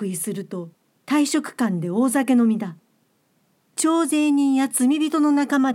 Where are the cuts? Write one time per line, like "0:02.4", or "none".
0:01.0